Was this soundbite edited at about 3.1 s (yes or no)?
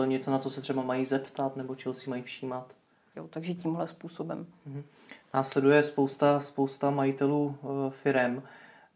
yes